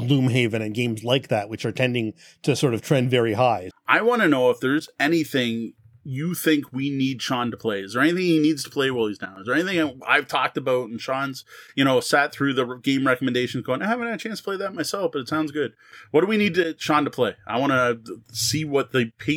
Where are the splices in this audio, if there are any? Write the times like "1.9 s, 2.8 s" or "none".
3.7 s